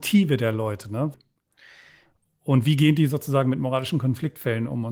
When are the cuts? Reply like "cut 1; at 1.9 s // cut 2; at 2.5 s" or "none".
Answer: cut 1; at 1.1 s